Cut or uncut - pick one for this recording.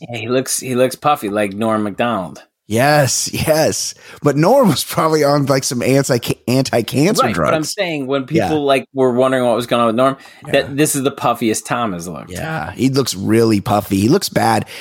uncut